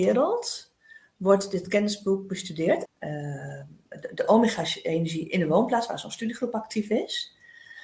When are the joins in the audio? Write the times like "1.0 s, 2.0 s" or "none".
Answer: 2.9 s